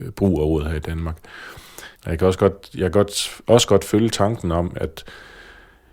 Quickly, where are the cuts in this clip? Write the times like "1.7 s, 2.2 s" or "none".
2.0 s